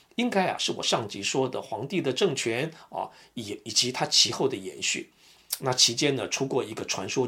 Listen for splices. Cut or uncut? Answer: uncut